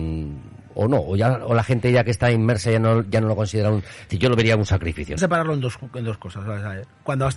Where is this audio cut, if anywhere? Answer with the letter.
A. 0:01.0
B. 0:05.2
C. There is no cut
B